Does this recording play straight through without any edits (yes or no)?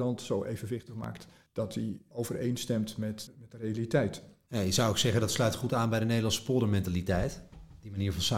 no